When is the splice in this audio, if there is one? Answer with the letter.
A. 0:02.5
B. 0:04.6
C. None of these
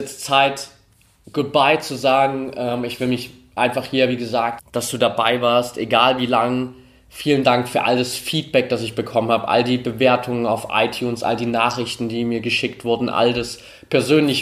B